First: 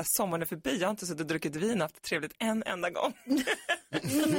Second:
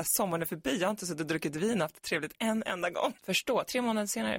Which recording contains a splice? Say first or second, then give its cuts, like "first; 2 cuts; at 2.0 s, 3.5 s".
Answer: second; 1 cut; at 3.2 s